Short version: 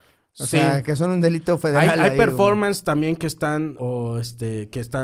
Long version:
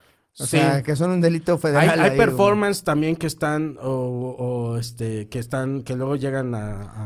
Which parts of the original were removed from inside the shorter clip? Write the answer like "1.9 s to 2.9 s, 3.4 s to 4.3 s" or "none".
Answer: 3.8 s to 4.4 s